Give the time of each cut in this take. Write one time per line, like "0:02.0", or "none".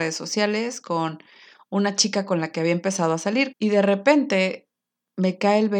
0:03.5